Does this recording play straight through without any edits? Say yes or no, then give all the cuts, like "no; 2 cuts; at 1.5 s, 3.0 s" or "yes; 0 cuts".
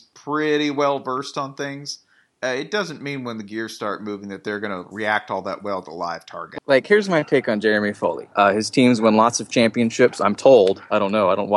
no; 2 cuts; at 6.6 s, 8.3 s